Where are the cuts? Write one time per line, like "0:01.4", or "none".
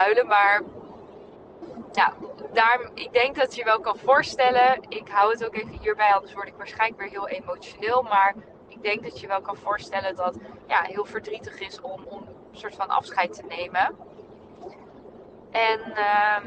0:10.2
0:12.0